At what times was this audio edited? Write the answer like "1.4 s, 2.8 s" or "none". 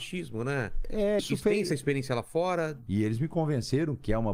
1.2 s, 2.9 s